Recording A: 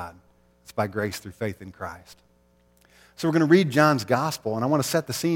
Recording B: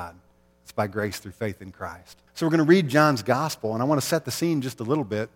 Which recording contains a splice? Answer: B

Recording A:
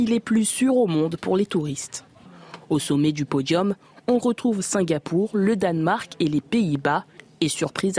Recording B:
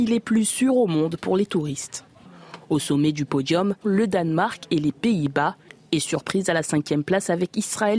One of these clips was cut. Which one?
B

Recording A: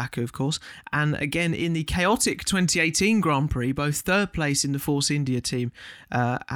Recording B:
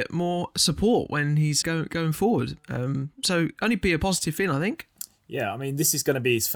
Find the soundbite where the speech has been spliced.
B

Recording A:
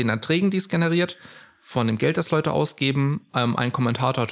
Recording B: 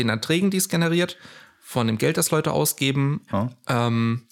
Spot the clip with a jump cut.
B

